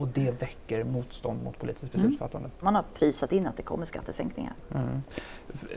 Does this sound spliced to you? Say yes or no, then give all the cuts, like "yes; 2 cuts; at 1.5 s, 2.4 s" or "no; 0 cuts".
yes; 1 cut; at 2.6 s